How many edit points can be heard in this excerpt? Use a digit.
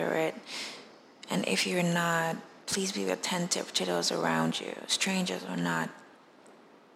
1